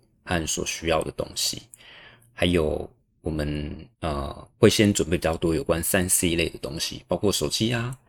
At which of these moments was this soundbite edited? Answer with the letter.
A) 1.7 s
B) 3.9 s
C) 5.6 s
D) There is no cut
B